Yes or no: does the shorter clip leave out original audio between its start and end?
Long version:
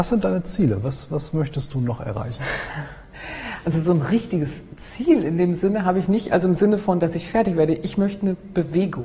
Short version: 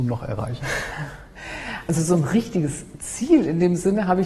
no